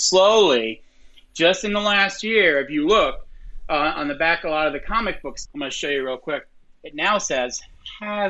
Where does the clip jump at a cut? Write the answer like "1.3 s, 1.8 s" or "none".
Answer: 5.4 s